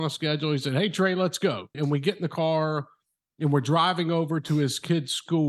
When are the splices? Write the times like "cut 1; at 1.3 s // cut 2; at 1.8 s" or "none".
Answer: cut 1; at 1.7 s